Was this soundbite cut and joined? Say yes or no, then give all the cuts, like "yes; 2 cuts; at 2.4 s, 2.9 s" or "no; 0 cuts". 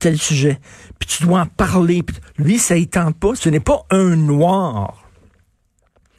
yes; 1 cut; at 3.4 s